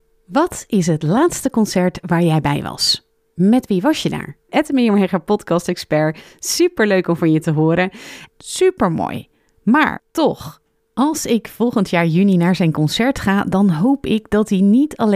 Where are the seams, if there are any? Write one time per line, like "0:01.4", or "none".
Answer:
0:04.5
0:08.3